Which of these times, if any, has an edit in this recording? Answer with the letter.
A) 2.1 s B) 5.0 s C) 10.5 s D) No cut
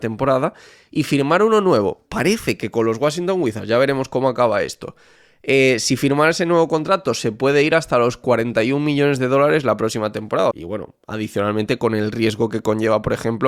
C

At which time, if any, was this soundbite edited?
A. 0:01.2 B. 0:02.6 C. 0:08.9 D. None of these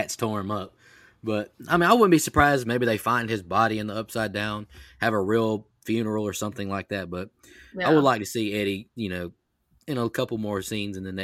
B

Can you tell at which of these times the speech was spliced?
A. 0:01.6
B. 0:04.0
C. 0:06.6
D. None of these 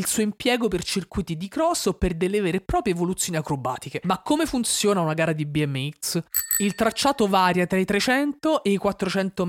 B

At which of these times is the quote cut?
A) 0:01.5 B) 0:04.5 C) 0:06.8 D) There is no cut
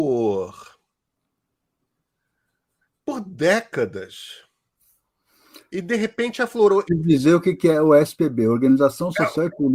C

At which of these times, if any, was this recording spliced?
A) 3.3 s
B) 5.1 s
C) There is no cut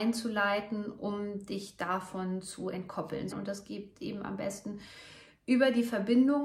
A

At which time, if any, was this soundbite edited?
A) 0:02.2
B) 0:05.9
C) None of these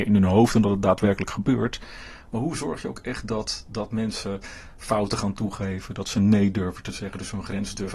C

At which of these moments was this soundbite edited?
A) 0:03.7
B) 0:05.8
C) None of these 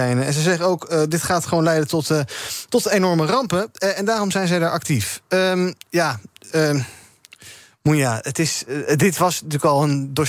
C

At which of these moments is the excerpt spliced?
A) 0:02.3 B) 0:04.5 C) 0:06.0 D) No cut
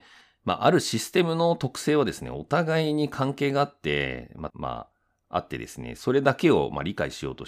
B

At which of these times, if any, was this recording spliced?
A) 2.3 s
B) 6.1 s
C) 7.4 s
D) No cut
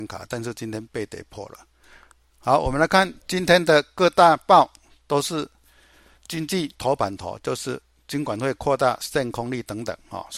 A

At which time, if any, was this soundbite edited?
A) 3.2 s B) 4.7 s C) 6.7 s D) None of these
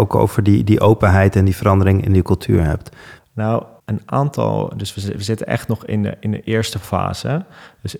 A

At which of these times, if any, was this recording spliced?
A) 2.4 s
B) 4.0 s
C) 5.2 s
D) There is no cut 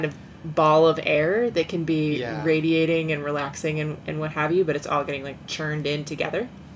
D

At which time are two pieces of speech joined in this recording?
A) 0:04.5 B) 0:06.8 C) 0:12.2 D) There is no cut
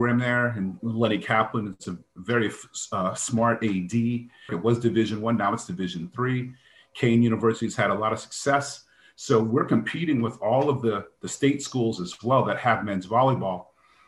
A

